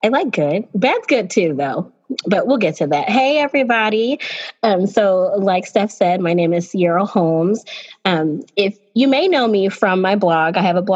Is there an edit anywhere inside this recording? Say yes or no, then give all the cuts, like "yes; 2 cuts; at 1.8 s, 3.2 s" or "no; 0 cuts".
no; 0 cuts